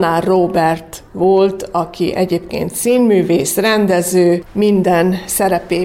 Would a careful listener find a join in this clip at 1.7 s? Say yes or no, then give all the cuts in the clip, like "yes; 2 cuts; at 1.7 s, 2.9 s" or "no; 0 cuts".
no; 1 cut; at 4.5 s